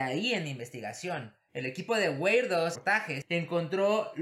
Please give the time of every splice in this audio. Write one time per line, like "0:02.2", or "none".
0:02.8